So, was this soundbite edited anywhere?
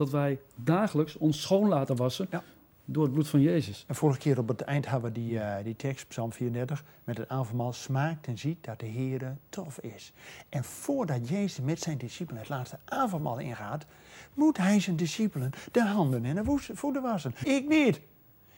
yes; 1 cut; at 17.4 s

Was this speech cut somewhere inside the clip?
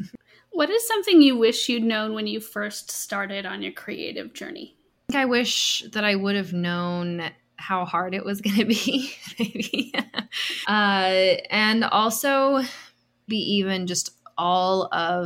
yes; 2 cuts; at 10.6 s, 13.3 s

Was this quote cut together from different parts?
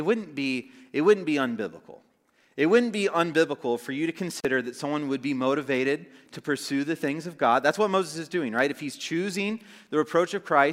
no; 0 cuts

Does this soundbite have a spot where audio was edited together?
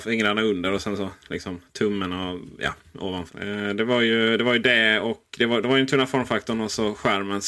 yes; 1 cut; at 3.3 s

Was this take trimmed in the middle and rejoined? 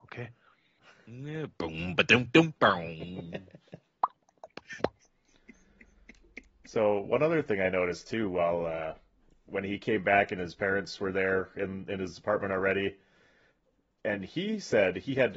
no; 0 cuts

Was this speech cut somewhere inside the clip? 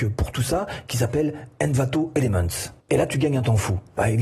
yes; 1 cut; at 2.8 s

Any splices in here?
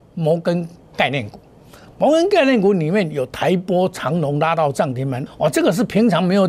yes; 1 cut; at 5.3 s

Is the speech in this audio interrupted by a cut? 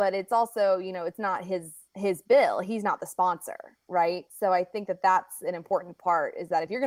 yes; 1 cut; at 3.8 s

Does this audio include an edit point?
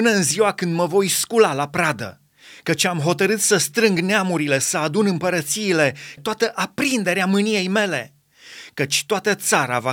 yes; 1 cut; at 6.2 s

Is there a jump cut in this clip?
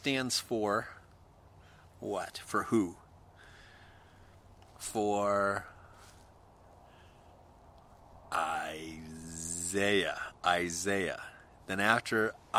no; 0 cuts

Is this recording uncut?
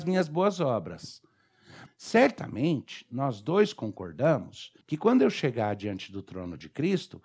no; 2 cuts; at 1.9 s, 4.8 s

